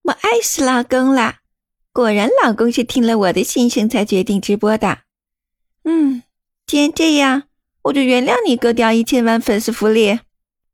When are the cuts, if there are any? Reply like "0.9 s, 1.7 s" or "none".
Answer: none